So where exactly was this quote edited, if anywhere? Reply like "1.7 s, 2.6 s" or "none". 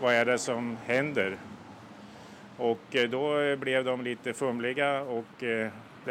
none